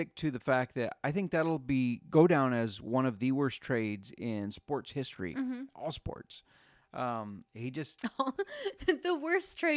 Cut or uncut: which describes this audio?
uncut